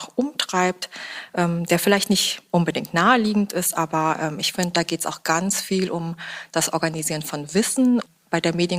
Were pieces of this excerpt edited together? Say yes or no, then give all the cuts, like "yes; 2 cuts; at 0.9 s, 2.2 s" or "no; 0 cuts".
no; 0 cuts